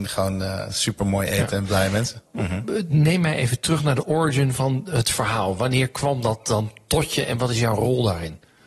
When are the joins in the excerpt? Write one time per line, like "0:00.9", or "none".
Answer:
0:02.3

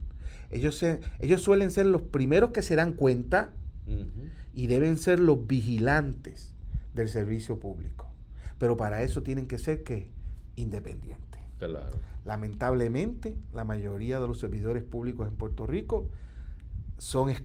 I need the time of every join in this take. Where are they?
none

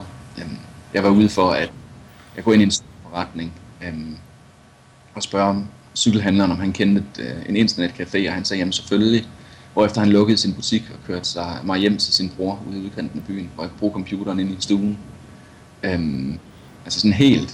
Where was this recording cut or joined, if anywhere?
none

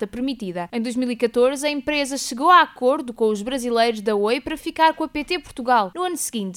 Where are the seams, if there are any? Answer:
none

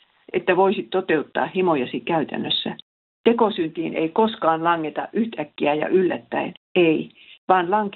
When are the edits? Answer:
0:03.0
0:06.6

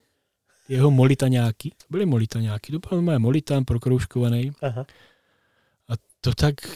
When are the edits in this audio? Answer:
0:01.8

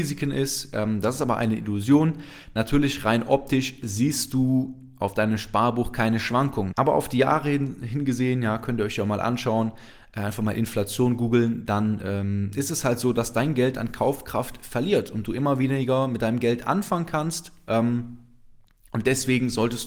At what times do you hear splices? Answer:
0:06.7

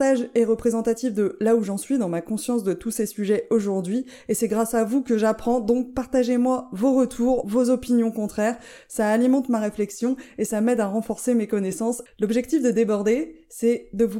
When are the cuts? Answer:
0:07.4
0:12.1

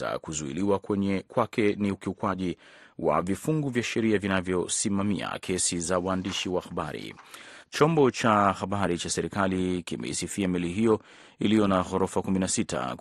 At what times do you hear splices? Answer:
0:07.6

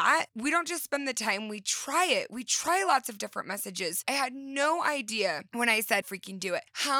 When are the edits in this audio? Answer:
0:04.0
0:06.0

